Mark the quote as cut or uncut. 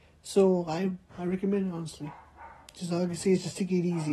cut